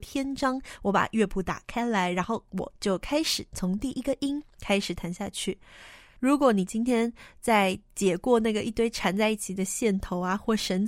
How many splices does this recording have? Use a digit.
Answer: 1